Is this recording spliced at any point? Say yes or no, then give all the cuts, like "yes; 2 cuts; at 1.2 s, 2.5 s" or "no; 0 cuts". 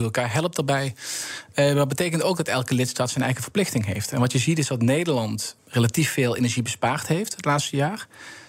yes; 1 cut; at 5.6 s